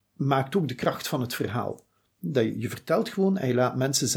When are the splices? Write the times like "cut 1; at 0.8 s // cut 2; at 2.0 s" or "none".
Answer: none